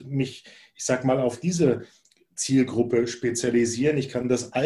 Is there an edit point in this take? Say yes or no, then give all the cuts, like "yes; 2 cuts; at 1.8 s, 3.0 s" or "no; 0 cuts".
no; 0 cuts